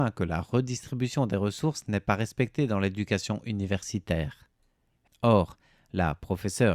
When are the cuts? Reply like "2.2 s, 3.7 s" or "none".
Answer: 5.1 s